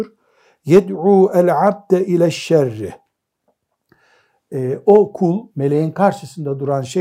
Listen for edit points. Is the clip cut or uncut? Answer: cut